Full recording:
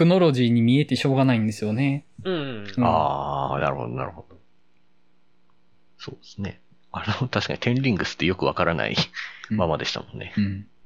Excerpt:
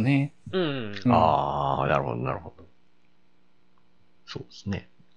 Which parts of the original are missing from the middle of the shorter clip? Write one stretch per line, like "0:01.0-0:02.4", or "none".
none